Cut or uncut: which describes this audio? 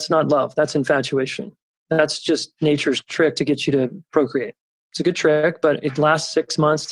uncut